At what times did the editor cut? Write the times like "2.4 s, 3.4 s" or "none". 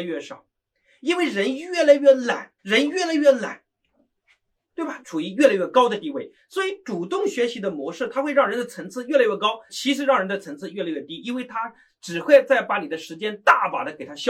2.6 s, 5.0 s, 9.7 s